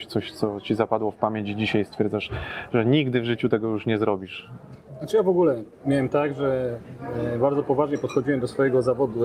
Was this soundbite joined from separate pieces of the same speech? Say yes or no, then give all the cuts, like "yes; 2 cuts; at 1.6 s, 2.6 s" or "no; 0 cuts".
no; 0 cuts